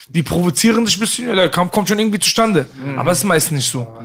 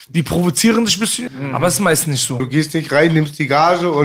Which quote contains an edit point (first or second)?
second